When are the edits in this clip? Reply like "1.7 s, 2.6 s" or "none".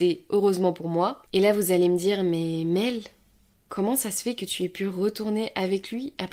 1.3 s